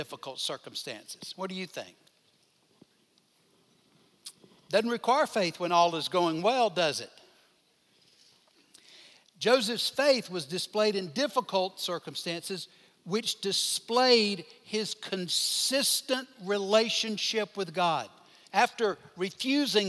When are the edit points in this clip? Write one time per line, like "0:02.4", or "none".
0:18.4